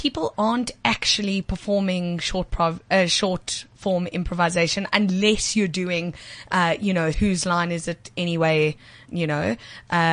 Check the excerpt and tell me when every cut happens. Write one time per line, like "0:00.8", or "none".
0:07.1
0:09.1